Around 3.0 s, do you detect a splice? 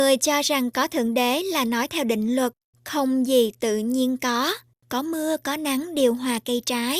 no; 1 cut; at 4.8 s

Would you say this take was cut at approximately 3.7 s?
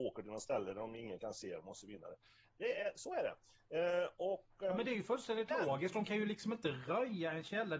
no; 0 cuts

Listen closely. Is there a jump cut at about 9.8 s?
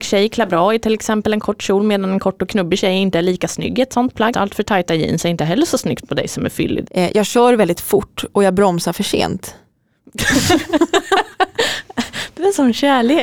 no; 3 cuts; at 1.4 s, 4.3 s, 6.9 s

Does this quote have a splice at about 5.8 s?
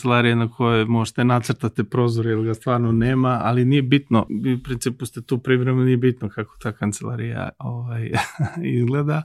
no; 1 cut; at 4.3 s

